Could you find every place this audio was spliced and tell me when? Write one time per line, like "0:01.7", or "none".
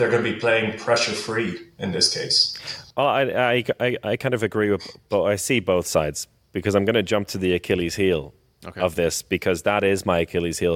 0:02.9